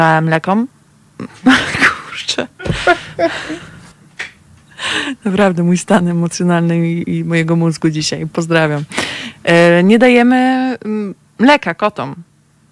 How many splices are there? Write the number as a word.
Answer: zero